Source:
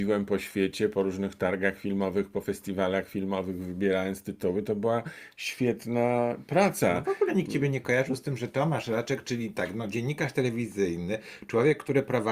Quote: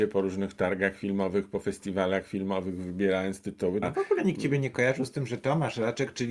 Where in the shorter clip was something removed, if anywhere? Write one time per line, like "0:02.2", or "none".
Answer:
0:03.8